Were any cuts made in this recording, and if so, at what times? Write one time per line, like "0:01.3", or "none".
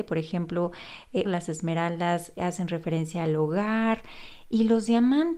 0:01.2
0:02.4